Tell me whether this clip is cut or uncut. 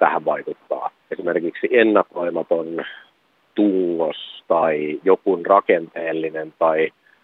cut